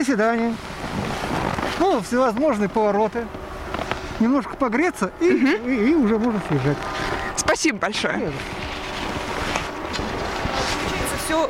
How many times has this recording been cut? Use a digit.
1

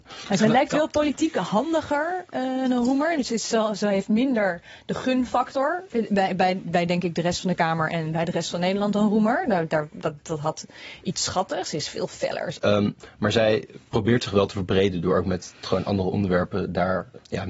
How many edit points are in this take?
1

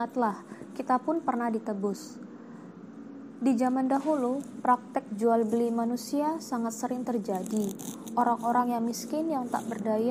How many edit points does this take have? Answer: 0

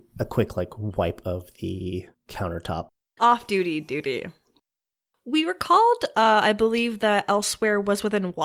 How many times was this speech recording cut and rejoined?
1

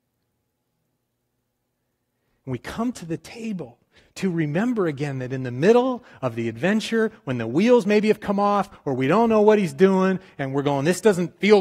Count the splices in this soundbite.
0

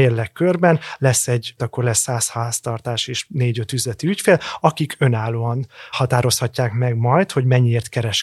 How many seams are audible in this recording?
1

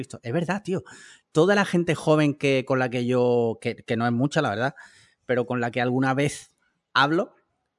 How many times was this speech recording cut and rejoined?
0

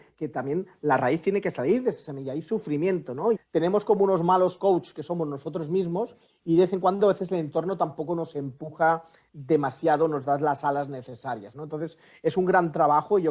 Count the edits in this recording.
1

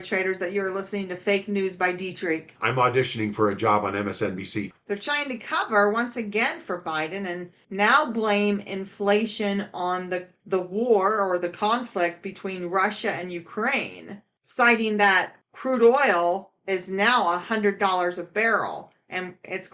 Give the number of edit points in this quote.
1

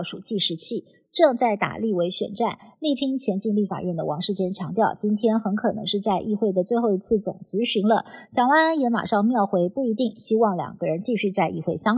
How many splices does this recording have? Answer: 0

